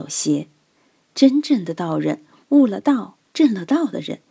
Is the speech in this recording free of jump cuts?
yes; 0 cuts

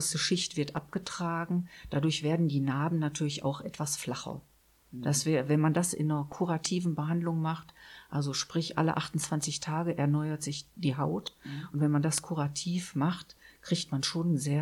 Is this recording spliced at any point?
no; 0 cuts

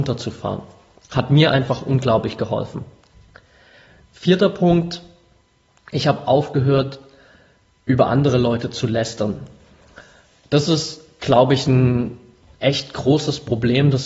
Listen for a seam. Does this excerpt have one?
no; 0 cuts

